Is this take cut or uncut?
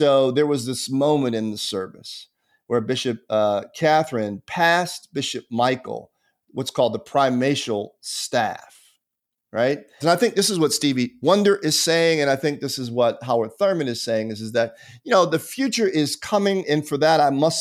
cut